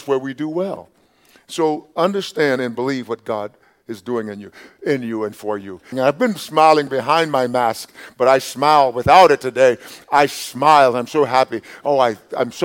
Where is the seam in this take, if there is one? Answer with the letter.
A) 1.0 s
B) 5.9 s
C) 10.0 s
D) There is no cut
B